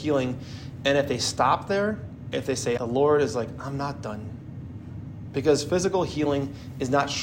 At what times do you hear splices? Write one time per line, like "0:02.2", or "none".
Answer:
0:02.8